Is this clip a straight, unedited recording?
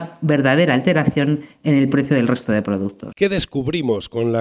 no; 1 cut; at 3.1 s

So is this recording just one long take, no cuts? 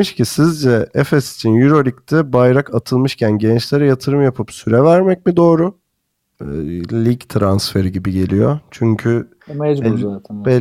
no; 1 cut; at 6.3 s

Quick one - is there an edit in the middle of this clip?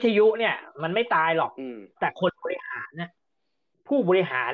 yes; 1 cut; at 1.9 s

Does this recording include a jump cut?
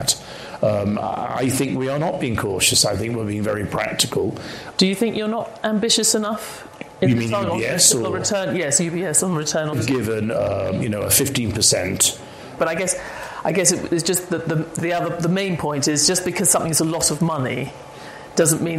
yes; 3 cuts; at 4.7 s, 9.7 s, 12.6 s

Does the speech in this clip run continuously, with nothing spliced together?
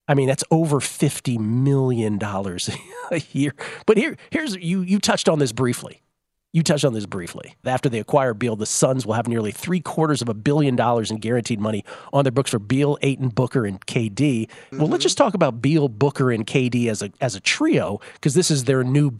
no; 2 cuts; at 7.6 s, 14.7 s

